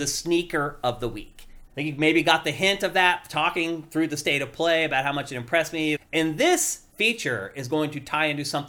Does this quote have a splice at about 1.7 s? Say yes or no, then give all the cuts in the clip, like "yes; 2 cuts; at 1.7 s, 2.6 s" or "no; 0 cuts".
yes; 2 cuts; at 1.7 s, 6.0 s